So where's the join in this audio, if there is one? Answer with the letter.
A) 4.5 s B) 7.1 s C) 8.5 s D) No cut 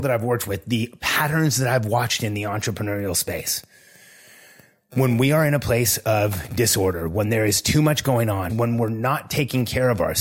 C